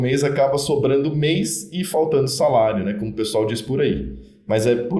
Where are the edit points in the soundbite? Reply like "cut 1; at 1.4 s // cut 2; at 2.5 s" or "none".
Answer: none